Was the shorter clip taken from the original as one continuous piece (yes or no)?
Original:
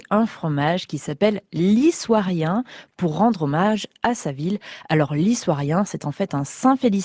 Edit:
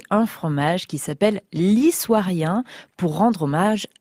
yes